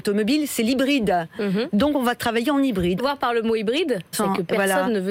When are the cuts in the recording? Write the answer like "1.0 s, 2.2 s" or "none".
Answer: 3.0 s, 4.1 s